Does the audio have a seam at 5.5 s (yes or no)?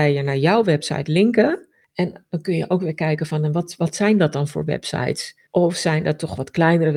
yes